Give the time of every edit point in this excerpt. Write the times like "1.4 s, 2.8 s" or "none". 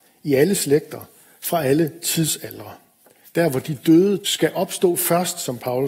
3.2 s, 4.2 s